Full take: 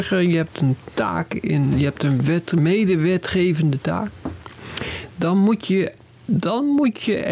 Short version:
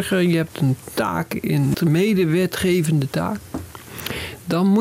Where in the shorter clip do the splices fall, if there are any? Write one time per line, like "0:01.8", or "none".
0:01.7